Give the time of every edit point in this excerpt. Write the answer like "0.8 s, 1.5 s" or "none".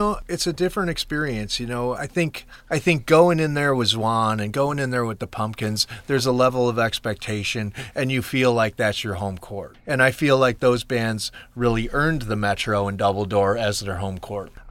1.9 s